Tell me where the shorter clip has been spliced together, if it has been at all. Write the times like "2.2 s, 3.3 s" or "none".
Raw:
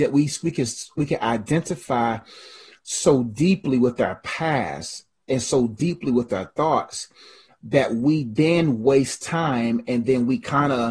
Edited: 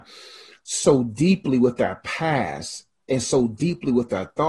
none